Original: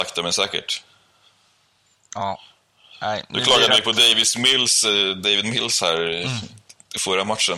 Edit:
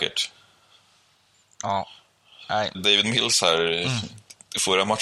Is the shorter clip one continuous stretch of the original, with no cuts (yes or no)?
no